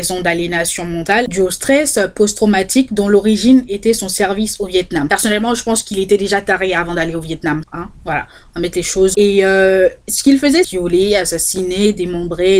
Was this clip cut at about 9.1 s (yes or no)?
yes